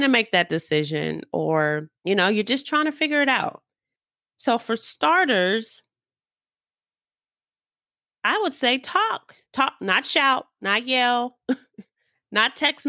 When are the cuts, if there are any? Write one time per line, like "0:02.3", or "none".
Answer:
0:01.9
0:09.4